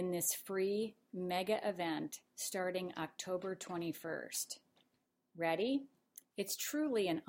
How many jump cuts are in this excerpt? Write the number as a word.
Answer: one